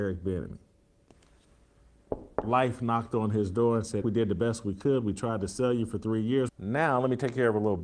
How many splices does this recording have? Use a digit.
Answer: 2